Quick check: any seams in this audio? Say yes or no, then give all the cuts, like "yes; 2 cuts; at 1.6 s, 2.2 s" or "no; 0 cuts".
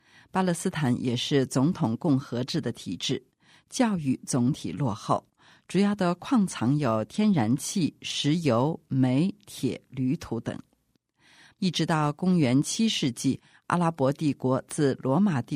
yes; 1 cut; at 11.5 s